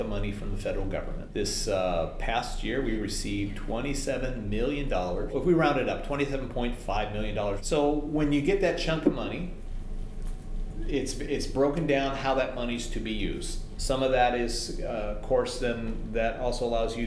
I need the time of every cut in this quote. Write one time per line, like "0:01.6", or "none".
0:13.8